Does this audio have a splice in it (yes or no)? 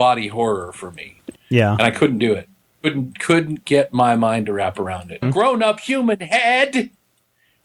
yes